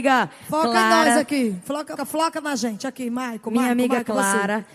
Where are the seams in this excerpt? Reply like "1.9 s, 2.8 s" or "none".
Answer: 2.0 s